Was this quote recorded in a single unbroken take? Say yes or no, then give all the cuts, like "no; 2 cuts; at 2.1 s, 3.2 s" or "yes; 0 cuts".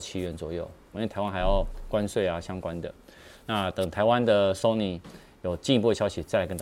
no; 1 cut; at 0.9 s